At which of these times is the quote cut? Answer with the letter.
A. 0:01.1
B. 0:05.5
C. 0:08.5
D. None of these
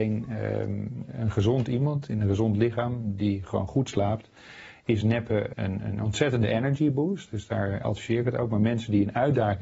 B